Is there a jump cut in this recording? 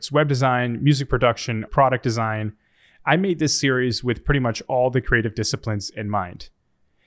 yes; 1 cut; at 1.7 s

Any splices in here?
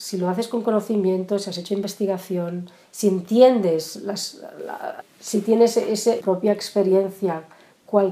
yes; 2 cuts; at 5.0 s, 6.2 s

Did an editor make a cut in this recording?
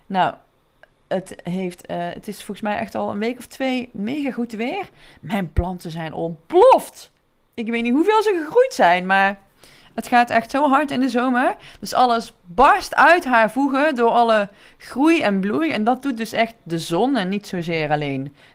no; 0 cuts

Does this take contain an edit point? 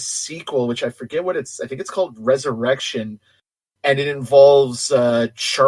no; 0 cuts

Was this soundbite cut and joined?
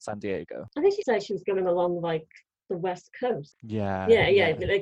yes; 2 cuts; at 1.0 s, 3.5 s

